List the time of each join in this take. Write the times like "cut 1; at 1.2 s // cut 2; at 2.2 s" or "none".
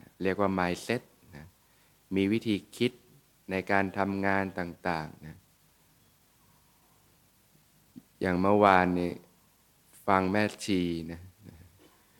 none